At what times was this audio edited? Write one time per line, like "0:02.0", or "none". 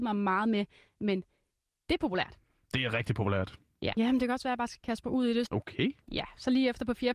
0:03.9
0:05.5